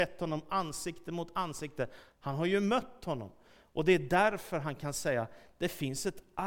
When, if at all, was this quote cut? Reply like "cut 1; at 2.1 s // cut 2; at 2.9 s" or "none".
cut 1; at 2.1 s